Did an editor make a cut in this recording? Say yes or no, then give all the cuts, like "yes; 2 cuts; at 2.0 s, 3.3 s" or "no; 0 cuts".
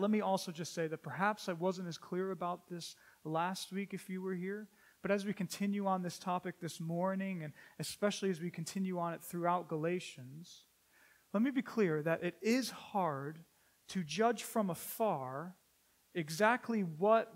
no; 0 cuts